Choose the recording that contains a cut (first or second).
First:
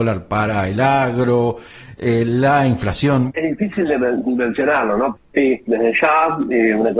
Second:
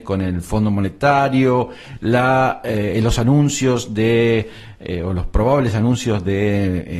first